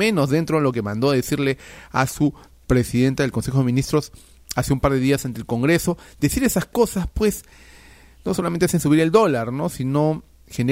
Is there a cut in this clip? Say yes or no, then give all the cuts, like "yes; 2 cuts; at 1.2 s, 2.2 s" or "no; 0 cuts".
no; 0 cuts